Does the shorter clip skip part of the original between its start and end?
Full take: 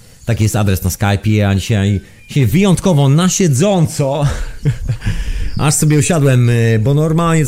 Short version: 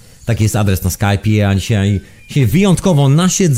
no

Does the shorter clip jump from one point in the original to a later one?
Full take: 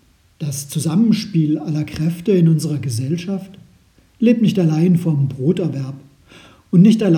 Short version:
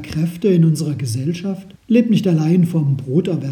yes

